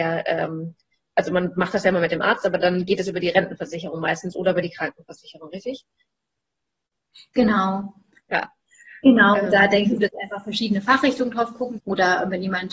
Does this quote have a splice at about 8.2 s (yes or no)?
yes